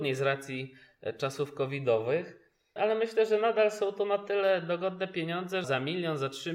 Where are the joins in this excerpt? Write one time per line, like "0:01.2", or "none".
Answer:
0:02.8
0:05.6